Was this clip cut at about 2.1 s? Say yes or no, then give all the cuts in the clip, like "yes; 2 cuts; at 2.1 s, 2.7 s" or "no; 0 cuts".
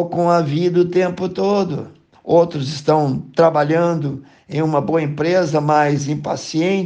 yes; 1 cut; at 2.1 s